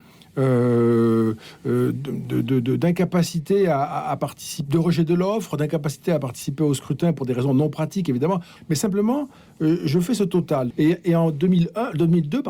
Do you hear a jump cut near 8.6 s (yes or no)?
yes